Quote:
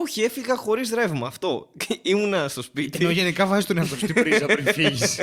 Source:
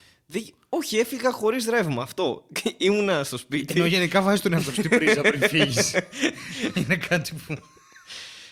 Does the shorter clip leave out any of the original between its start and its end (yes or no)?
no